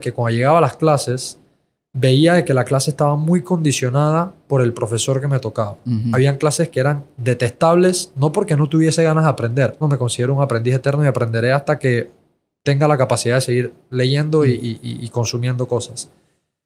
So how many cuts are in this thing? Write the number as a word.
one